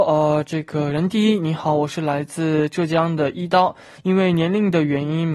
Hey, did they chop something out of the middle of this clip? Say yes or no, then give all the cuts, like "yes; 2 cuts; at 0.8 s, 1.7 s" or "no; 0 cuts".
yes; 1 cut; at 4.0 s